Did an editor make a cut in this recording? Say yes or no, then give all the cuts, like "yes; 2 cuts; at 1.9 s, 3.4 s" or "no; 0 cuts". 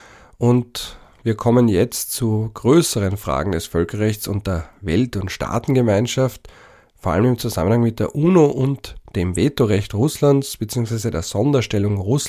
no; 0 cuts